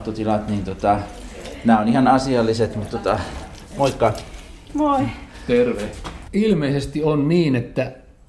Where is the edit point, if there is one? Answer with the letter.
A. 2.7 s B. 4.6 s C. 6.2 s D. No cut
C